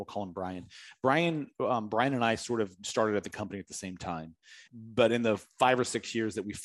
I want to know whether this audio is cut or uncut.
cut